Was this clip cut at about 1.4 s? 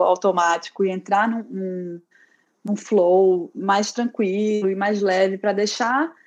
no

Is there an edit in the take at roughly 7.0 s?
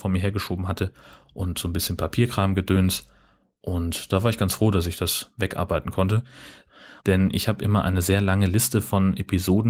yes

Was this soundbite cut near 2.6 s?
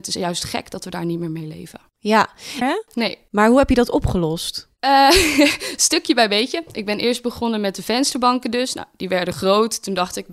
yes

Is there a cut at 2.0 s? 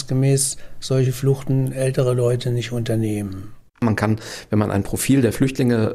no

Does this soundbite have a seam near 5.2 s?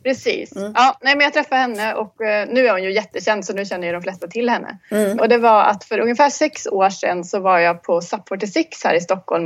yes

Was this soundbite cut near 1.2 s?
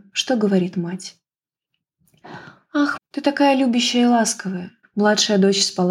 no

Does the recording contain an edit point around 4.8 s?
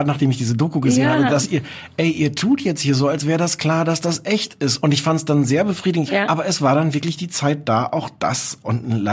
yes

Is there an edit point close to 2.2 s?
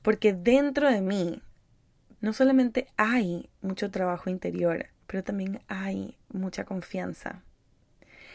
yes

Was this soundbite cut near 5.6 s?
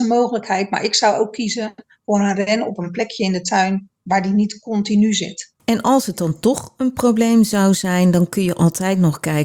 yes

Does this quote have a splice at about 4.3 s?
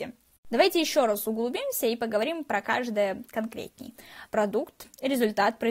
yes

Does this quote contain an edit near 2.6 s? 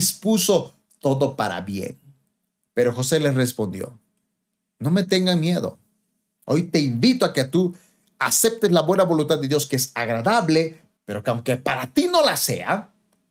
yes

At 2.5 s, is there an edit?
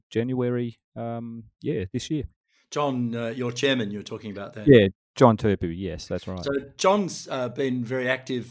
no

